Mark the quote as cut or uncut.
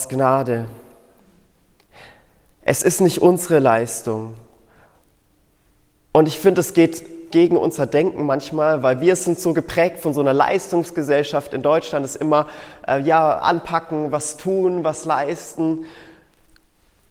cut